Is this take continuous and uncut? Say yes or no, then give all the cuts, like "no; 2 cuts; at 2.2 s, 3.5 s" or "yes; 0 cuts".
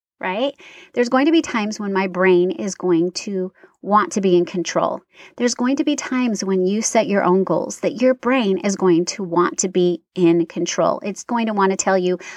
no; 1 cut; at 11.3 s